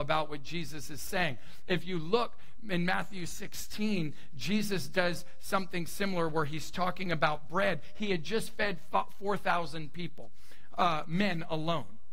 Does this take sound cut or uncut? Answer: uncut